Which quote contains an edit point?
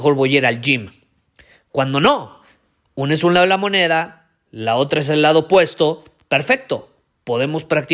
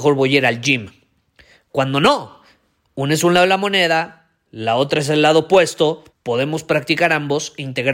second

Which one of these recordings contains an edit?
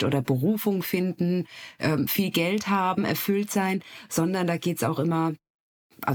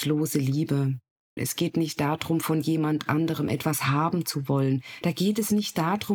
second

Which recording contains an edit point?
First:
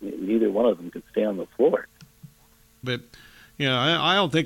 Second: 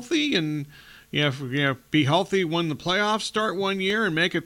first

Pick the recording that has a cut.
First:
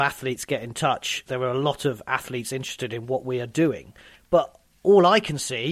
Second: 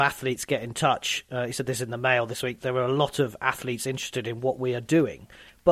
first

